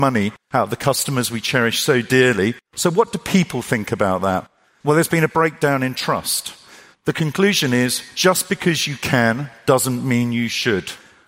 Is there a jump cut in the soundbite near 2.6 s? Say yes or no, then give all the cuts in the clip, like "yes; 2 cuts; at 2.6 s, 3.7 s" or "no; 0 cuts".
no; 2 cuts; at 4.8 s, 6.9 s